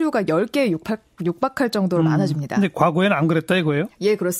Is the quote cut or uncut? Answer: uncut